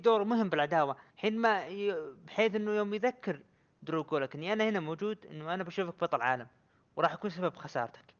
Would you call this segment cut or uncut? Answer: cut